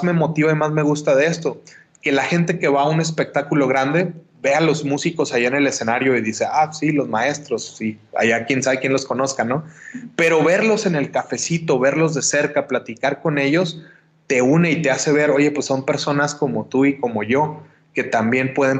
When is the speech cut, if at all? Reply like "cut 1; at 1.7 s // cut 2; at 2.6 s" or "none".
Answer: none